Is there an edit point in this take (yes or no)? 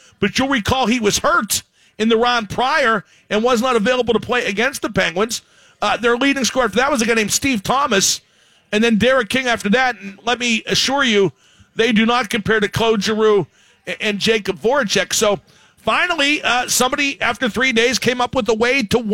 no